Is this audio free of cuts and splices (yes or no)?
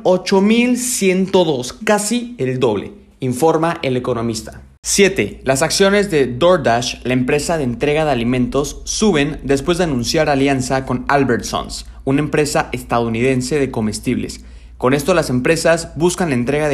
no